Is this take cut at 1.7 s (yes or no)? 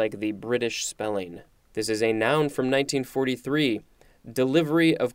yes